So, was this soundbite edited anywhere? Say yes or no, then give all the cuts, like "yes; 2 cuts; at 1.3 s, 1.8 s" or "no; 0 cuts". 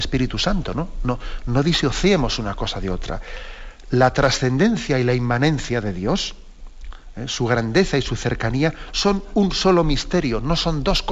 no; 0 cuts